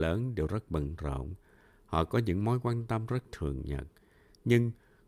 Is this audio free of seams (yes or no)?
yes